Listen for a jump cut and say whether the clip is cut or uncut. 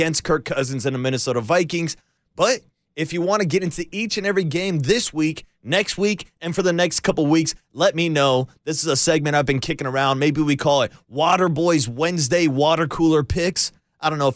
cut